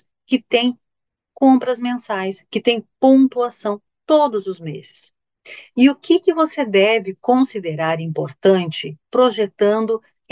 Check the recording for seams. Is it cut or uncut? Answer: cut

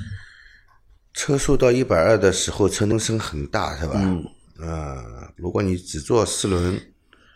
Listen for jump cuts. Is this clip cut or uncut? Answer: cut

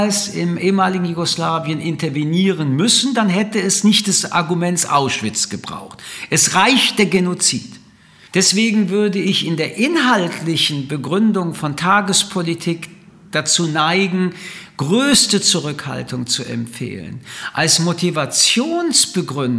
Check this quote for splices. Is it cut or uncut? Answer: cut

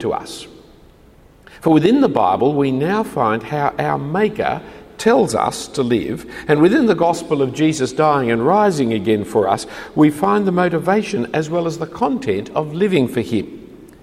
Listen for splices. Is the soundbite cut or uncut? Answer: uncut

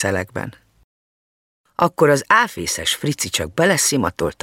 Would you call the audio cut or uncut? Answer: uncut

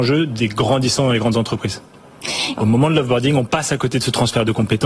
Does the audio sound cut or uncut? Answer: cut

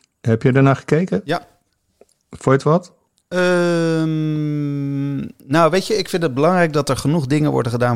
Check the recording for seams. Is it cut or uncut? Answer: uncut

